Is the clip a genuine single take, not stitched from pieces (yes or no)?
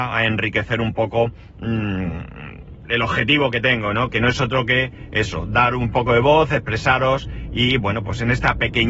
yes